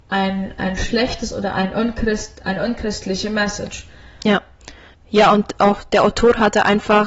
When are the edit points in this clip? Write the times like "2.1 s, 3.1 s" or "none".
none